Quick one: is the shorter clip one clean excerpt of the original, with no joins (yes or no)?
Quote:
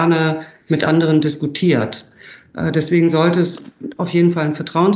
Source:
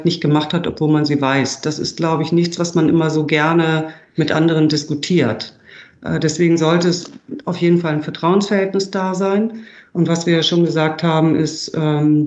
yes